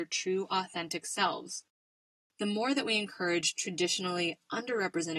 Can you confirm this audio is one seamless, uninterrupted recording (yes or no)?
yes